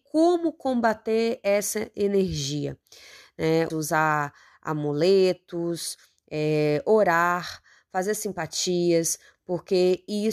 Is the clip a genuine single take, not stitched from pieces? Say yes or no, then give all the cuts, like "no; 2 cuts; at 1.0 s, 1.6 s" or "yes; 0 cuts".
no; 1 cut; at 3.7 s